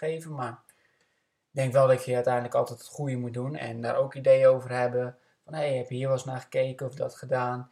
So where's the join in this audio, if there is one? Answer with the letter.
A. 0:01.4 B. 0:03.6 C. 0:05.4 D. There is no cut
B